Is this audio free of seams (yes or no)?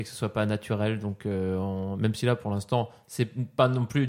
yes